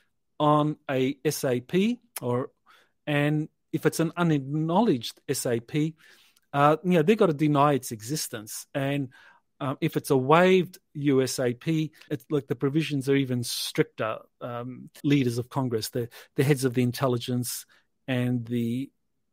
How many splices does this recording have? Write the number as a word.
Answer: two